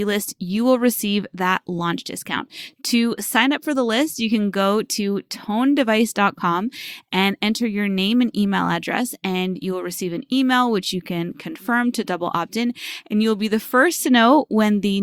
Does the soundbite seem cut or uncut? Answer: uncut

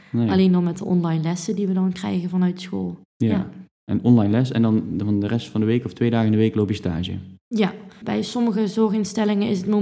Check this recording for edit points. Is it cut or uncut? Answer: cut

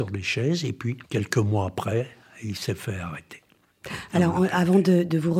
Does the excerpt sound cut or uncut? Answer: cut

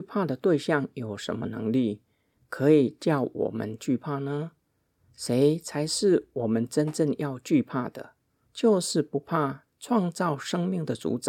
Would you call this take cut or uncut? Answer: cut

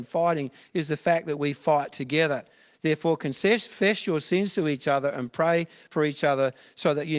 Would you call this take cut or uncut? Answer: cut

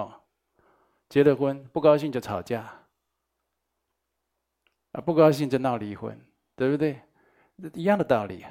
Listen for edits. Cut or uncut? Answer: uncut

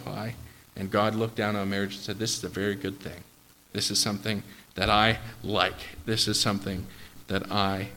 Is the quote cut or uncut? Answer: uncut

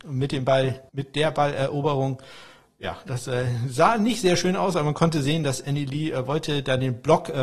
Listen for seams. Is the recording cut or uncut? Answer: uncut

